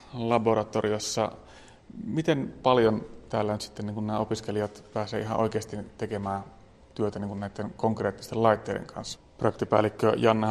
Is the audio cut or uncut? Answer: cut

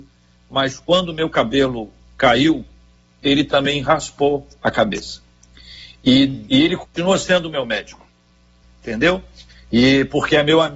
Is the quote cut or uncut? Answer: cut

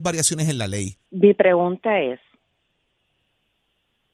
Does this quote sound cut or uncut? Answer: cut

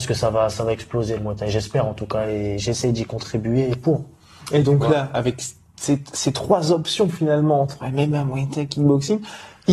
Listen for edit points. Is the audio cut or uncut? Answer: uncut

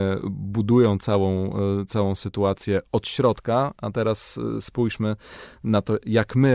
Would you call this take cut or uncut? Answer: uncut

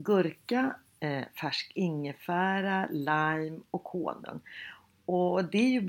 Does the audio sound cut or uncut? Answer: uncut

